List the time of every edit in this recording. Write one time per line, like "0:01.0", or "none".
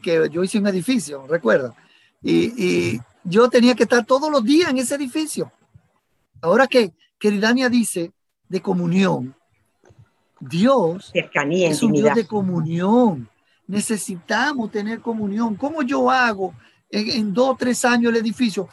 none